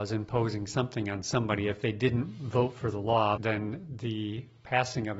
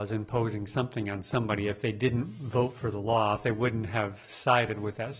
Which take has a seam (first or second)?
first